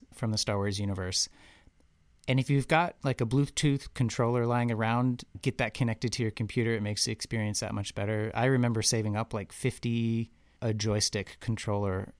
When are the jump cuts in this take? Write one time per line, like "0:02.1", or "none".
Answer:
0:10.6

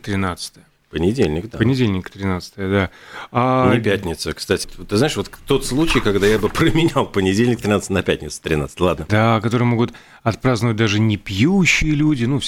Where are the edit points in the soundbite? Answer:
0:04.6
0:09.1

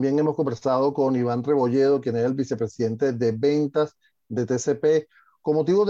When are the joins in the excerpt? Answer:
none

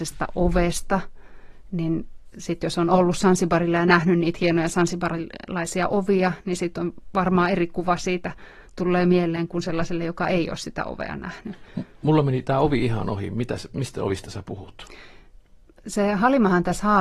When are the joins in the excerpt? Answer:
none

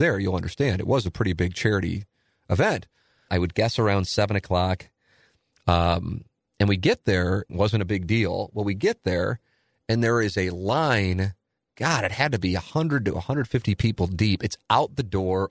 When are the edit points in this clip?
0:03.3
0:07.5

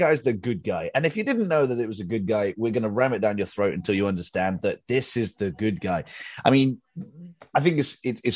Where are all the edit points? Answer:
none

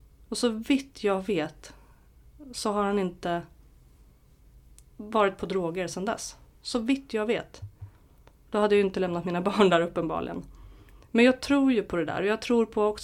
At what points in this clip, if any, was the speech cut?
none

